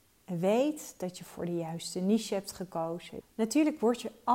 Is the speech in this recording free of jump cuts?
no; 1 cut; at 3.2 s

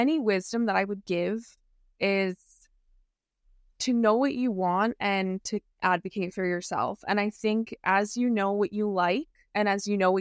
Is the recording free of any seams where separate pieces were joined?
yes; 0 cuts

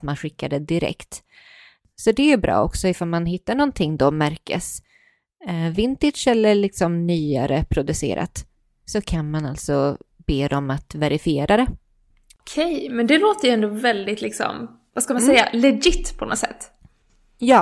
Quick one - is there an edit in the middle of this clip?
yes; 2 cuts; at 12.4 s, 14.9 s

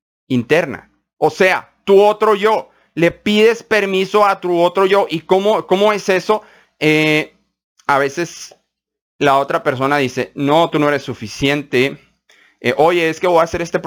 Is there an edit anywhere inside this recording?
no; 0 cuts

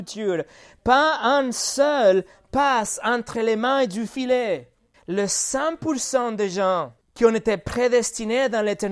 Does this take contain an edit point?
yes; 2 cuts; at 4.9 s, 7.0 s

